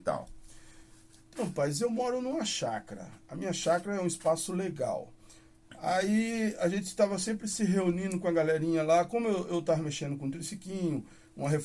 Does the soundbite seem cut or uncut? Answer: uncut